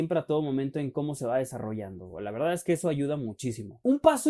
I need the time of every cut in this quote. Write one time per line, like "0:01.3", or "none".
none

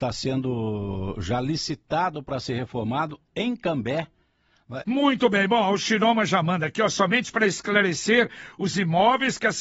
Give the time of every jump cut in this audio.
0:04.8

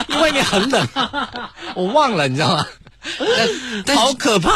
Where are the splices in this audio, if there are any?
none

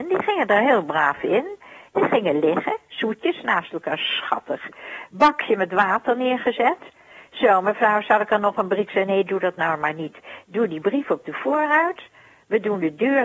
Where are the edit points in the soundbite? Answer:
none

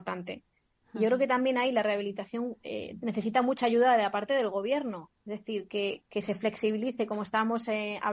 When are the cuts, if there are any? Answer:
none

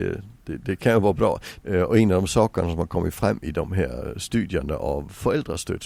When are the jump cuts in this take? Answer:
0:01.6

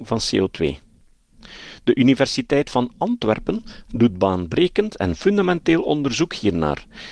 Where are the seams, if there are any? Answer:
none

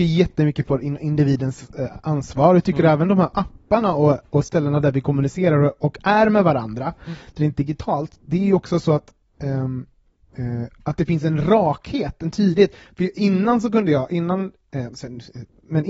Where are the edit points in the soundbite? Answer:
none

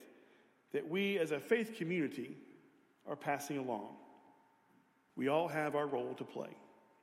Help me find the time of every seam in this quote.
0:05.1

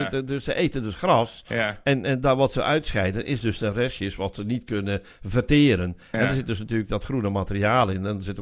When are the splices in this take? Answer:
none

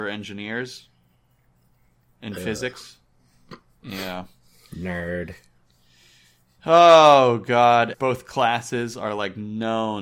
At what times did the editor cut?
0:07.9

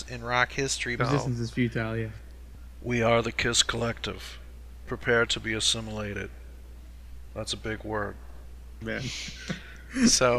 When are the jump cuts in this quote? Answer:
0:01.0
0:07.3
0:08.8

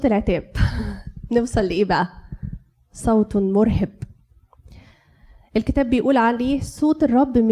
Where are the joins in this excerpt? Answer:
none

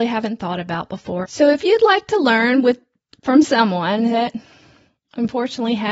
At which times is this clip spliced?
0:01.2

